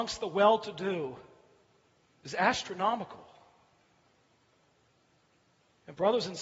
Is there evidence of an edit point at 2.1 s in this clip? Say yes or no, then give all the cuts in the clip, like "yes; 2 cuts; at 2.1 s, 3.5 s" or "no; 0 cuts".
yes; 1 cut; at 2.1 s